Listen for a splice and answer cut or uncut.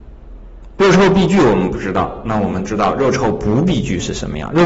uncut